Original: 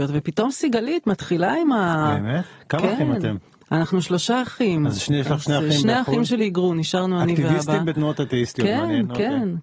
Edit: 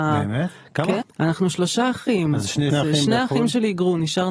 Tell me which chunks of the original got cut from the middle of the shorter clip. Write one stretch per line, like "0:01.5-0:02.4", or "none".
0:03.0-0:03.5
0:05.2-0:05.5